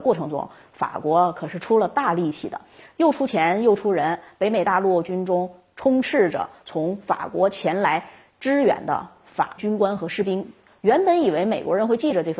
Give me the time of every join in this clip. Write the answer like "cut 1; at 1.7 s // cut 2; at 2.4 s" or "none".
cut 1; at 9.6 s